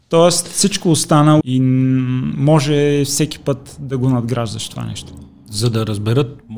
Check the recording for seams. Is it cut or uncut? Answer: cut